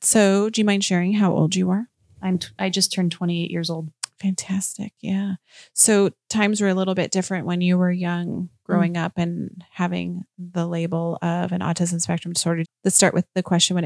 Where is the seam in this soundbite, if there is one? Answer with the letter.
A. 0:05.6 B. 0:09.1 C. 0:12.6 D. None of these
C